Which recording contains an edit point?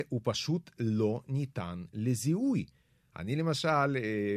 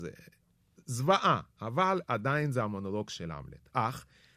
first; 1 cut; at 3.1 s

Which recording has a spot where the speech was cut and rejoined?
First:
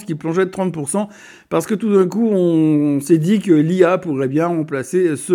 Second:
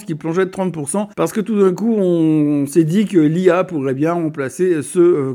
second; 1 cut; at 1.1 s

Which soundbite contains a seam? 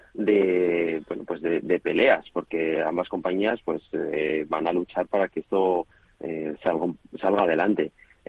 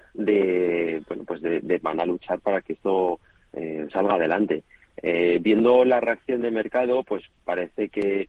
second; 2 cuts; at 1.8 s, 3.9 s

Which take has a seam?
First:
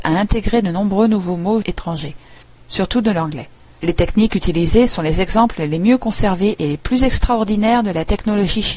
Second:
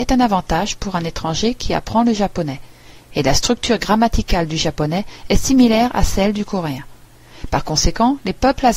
first; 1 cut; at 3.8 s

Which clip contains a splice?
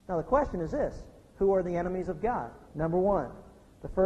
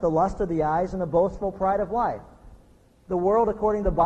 first; 1 cut; at 2.7 s

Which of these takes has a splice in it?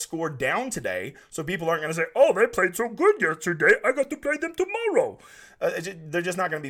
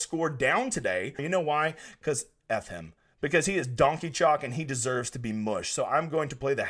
second; 1 cut; at 1.2 s

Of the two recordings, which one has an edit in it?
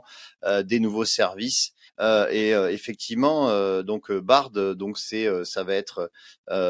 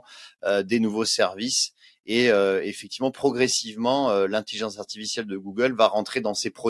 first; 1 cut; at 1.9 s

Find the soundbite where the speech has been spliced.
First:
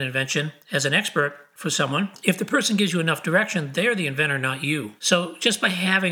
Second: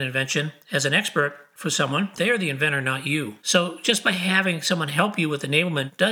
second; 1 cut; at 2.2 s

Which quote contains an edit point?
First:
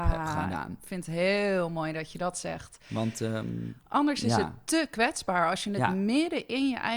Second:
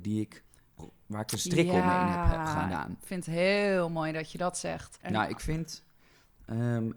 second; 1 cut; at 5.0 s

